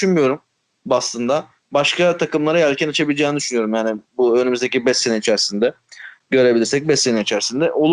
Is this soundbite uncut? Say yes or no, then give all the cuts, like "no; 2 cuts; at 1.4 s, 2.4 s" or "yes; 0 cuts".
yes; 0 cuts